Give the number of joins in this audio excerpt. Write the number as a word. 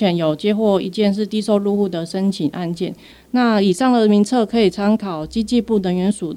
one